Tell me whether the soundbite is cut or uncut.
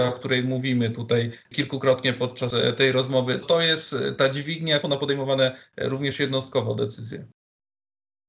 cut